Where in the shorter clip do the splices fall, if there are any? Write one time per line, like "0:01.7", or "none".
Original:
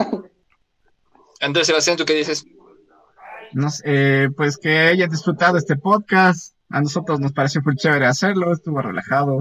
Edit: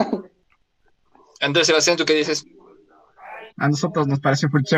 0:03.5